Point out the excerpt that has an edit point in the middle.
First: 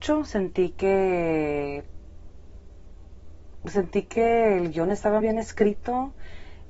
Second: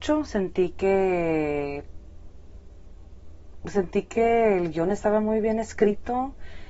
first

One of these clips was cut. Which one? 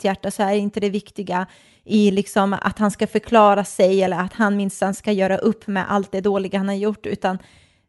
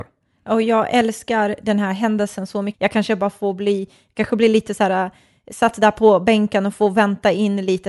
second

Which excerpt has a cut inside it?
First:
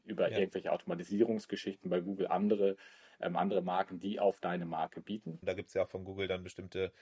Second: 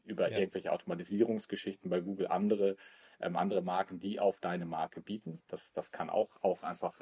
first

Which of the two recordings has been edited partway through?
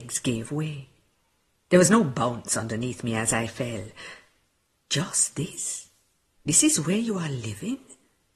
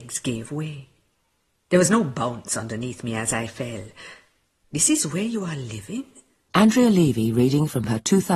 second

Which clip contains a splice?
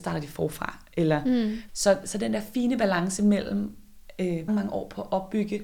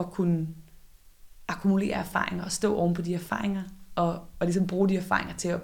first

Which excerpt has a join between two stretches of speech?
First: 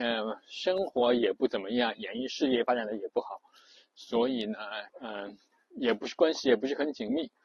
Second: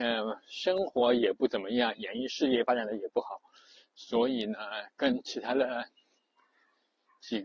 first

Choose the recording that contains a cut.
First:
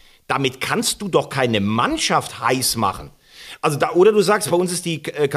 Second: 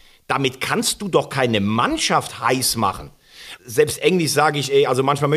second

